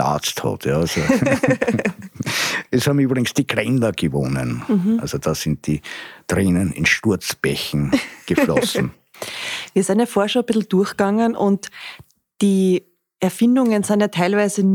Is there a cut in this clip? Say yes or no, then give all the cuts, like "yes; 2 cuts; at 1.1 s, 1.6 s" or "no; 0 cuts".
no; 0 cuts